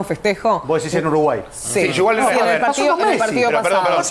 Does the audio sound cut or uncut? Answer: uncut